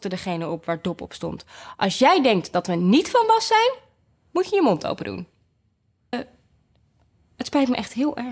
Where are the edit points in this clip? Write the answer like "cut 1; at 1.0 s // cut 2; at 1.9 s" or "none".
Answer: cut 1; at 6.1 s